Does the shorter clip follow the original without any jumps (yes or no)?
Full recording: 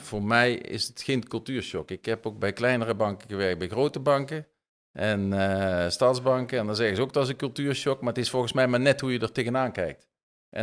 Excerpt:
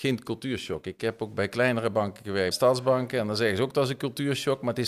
no